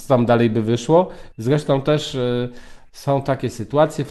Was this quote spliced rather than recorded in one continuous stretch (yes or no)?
yes